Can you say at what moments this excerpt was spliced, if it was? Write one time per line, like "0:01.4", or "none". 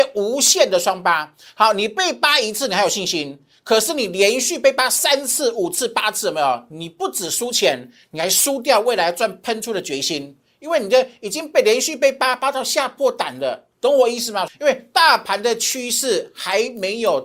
0:14.5